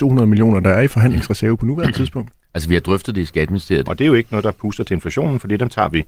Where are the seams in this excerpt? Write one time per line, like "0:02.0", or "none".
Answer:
0:03.9